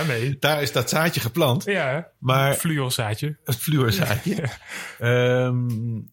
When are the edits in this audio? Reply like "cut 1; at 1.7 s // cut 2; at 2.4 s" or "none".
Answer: none